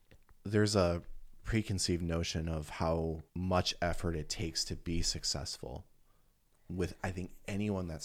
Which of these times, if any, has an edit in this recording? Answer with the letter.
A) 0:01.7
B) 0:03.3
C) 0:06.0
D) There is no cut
B